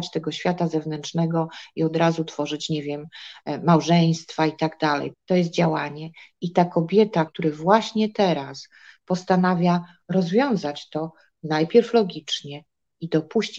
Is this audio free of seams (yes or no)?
no